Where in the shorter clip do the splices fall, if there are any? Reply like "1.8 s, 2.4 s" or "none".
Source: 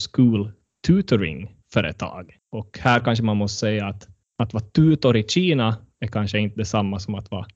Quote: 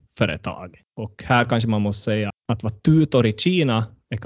2.3 s